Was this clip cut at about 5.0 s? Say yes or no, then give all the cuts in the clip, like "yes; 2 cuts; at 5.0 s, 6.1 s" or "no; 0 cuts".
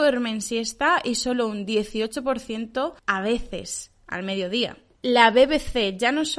yes; 2 cuts; at 3.0 s, 5.0 s